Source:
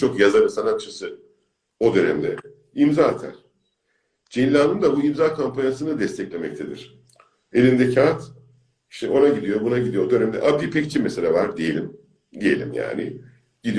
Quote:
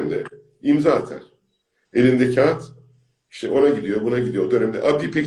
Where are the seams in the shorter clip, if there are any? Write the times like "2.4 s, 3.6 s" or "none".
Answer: 1.9 s